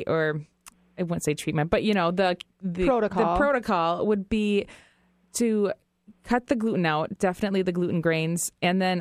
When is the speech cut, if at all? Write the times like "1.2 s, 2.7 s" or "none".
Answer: none